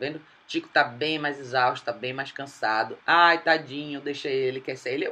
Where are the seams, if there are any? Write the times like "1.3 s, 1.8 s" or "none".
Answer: 3.0 s